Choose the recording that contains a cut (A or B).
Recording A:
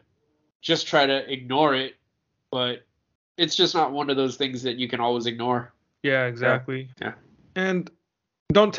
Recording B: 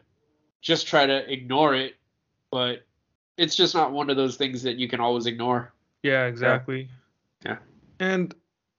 A